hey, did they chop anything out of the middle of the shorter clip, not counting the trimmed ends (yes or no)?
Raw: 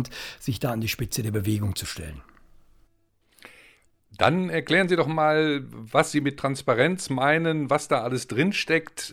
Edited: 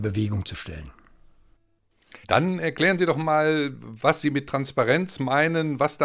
yes